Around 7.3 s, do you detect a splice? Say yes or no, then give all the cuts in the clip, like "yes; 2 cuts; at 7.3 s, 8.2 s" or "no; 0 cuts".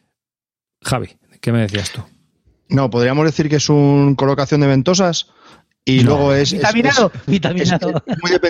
yes; 1 cut; at 7.3 s